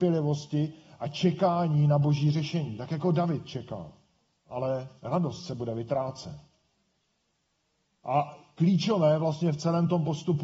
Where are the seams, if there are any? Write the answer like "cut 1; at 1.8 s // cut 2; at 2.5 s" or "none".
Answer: cut 1; at 4.4 s